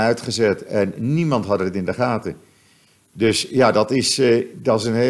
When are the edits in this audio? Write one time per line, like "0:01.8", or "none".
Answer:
none